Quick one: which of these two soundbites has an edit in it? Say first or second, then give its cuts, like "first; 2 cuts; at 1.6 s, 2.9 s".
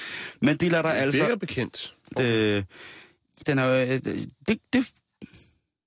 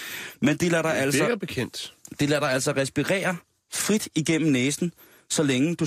first; 2 cuts; at 2.2 s, 3.4 s